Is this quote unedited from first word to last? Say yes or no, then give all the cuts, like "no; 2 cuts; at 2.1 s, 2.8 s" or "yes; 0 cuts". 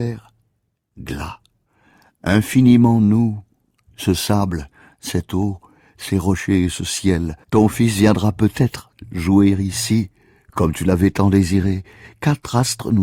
no; 1 cut; at 7.4 s